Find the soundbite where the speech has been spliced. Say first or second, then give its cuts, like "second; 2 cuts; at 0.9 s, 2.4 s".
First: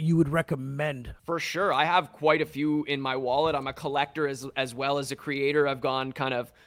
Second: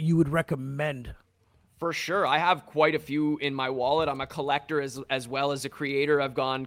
first; 1 cut; at 1.2 s